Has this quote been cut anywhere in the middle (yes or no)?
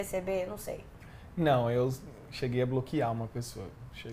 no